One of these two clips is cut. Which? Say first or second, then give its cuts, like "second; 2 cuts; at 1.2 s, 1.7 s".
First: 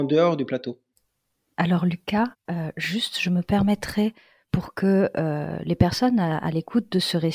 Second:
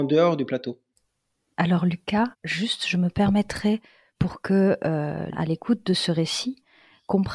second; 2 cuts; at 2.4 s, 5.3 s